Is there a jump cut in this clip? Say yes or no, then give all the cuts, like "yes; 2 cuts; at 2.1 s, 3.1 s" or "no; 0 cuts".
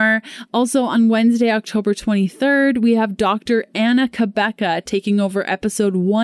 no; 0 cuts